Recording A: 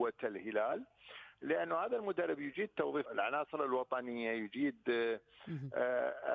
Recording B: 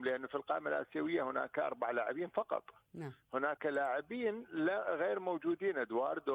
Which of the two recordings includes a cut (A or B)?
A